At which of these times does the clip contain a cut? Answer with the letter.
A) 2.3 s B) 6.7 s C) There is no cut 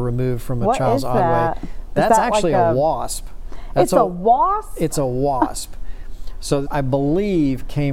B